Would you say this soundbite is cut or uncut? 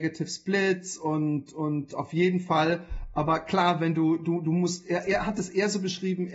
uncut